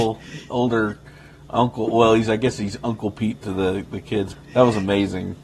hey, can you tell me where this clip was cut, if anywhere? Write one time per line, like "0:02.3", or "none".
0:04.3